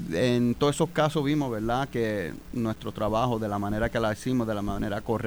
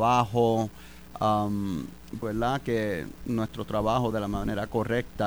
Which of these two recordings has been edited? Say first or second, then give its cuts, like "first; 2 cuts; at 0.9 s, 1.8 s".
second; 2 cuts; at 2.2 s, 4.1 s